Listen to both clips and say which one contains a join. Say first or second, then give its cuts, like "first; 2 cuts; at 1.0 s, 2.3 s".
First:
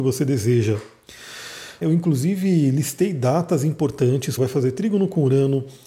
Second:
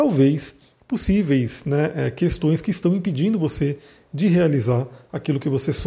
first; 2 cuts; at 1.8 s, 4.4 s